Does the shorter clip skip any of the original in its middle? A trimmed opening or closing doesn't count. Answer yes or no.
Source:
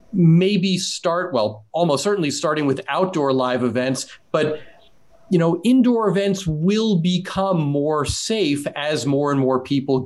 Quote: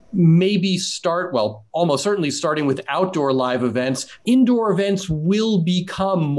yes